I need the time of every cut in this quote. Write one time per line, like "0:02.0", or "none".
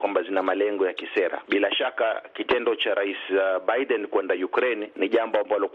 0:01.4